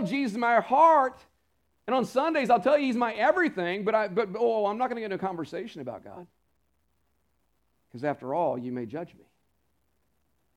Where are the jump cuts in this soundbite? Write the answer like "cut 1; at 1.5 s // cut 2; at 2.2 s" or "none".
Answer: none